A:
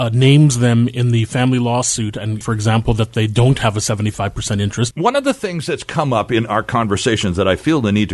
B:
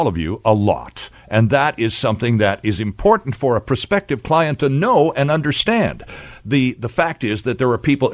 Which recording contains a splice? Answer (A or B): A